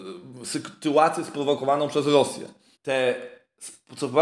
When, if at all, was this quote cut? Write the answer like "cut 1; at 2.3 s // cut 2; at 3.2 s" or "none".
cut 1; at 2.7 s